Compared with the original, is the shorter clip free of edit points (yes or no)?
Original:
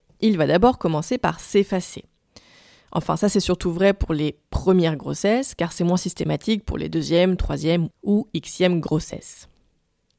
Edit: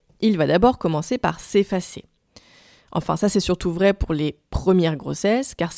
yes